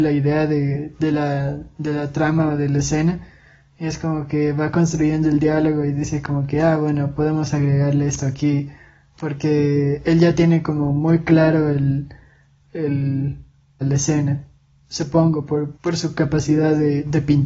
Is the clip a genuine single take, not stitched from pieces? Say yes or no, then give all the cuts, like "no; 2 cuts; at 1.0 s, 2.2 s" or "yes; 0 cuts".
no; 2 cuts; at 13.8 s, 15.8 s